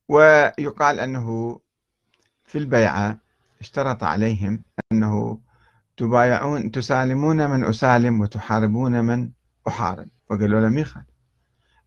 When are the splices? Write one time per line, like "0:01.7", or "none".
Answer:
0:10.2